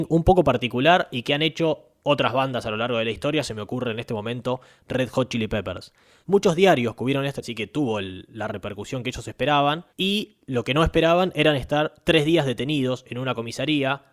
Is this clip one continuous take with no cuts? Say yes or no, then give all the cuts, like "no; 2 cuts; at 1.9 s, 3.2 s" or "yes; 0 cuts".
no; 3 cuts; at 6.2 s, 7.4 s, 9.9 s